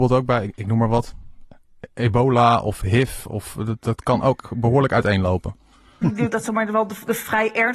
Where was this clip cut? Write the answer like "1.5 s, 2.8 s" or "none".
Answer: 3.8 s, 6.0 s

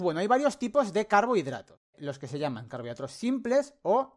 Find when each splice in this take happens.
none

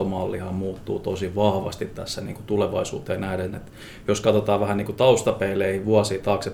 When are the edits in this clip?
none

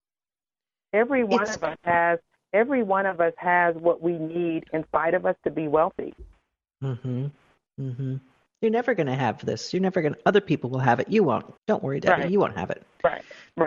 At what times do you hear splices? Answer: 7.7 s, 11.6 s

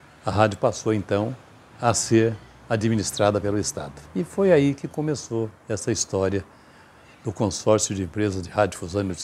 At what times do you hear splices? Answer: 4.1 s

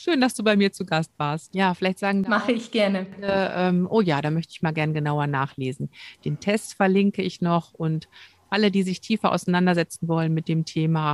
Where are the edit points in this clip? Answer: 1.5 s

